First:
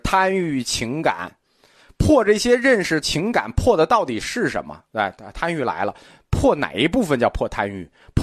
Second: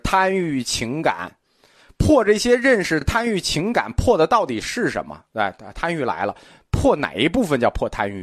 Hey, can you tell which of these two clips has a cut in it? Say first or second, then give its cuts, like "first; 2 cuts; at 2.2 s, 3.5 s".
first; 1 cut; at 3.0 s